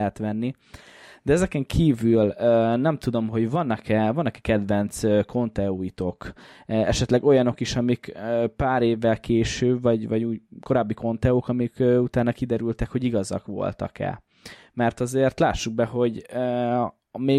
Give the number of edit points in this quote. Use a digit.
1